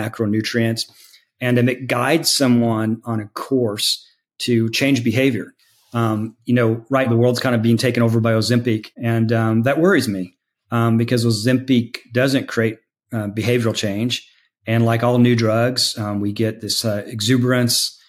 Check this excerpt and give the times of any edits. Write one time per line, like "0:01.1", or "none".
0:07.1
0:08.9